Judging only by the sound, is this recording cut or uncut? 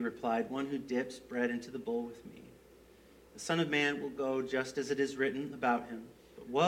uncut